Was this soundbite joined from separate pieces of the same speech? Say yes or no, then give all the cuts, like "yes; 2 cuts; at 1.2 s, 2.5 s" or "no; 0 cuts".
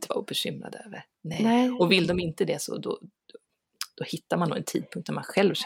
no; 0 cuts